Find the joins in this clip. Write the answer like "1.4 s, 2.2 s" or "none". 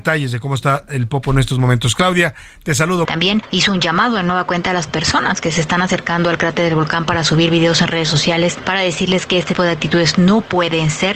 3.0 s, 9.5 s

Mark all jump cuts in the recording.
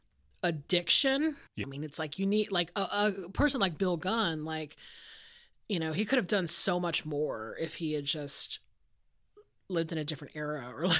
1.6 s

